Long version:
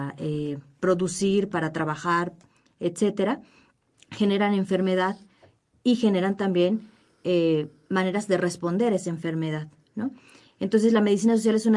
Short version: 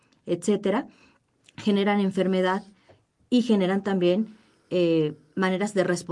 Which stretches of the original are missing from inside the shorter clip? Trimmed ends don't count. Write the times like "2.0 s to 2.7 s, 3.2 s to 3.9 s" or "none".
none